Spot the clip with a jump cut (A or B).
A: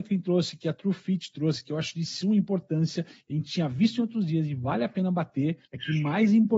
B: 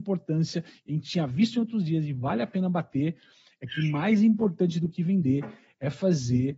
A